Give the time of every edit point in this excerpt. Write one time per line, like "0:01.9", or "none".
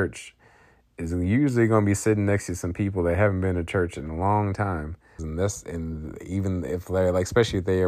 0:05.2